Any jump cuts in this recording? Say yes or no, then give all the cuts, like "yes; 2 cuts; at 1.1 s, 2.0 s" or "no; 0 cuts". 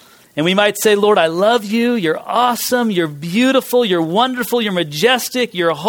no; 0 cuts